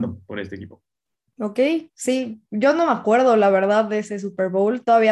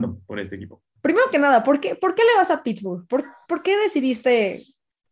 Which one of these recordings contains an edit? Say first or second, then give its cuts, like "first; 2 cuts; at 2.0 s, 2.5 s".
second; 1 cut; at 1.0 s